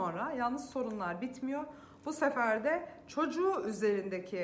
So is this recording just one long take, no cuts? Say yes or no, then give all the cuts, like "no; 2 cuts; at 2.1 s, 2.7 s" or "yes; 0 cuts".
yes; 0 cuts